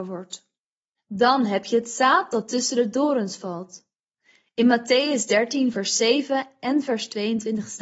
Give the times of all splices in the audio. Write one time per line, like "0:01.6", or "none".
none

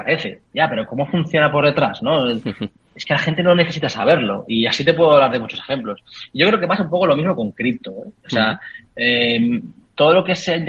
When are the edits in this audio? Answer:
none

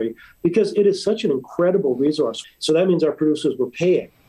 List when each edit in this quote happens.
0:02.4

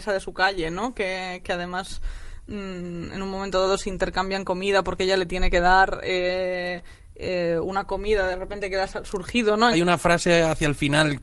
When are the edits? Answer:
0:09.7

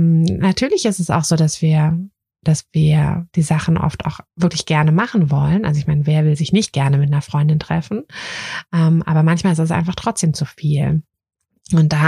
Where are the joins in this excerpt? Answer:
none

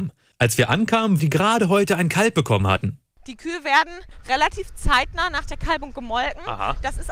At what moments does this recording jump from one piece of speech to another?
0:01.2

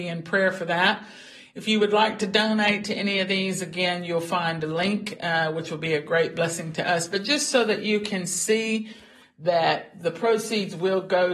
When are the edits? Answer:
none

